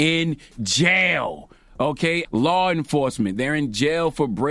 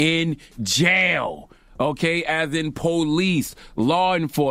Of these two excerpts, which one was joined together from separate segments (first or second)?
first